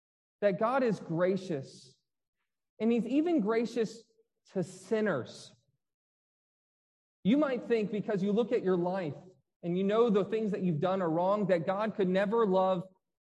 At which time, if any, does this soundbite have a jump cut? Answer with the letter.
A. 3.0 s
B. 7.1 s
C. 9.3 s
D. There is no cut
D